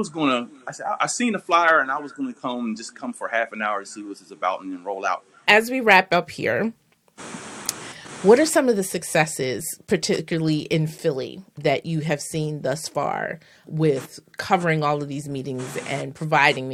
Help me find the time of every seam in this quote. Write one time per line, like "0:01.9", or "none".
0:05.5